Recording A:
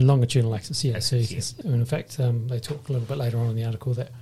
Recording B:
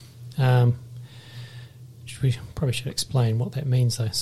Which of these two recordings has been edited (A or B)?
A